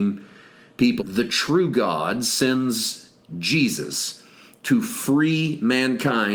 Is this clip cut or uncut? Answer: cut